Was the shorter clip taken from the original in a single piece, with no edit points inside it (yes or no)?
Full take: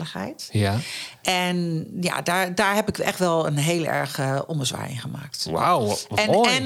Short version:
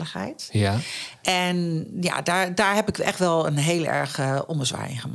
yes